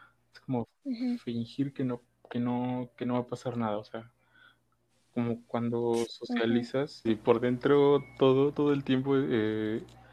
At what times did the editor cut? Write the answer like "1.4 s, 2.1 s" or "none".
7.1 s, 8.5 s